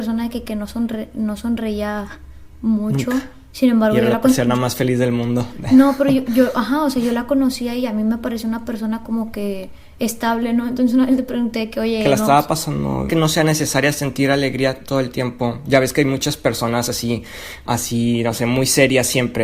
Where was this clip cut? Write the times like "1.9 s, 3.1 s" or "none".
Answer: 13.1 s, 17.7 s